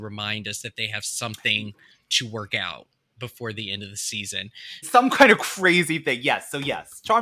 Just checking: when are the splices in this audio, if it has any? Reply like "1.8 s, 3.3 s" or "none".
4.8 s